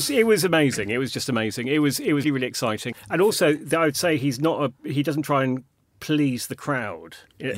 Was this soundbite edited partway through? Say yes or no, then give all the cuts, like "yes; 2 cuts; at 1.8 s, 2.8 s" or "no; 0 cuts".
yes; 1 cut; at 2.2 s